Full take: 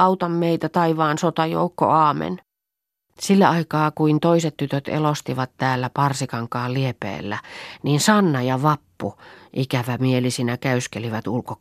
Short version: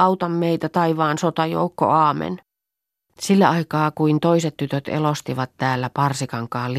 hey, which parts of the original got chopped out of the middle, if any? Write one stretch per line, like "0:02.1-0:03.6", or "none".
none